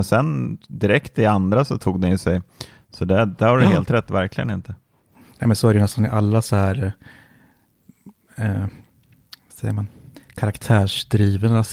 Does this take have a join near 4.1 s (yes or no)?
yes